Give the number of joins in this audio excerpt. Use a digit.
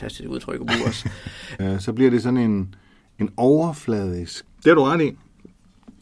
2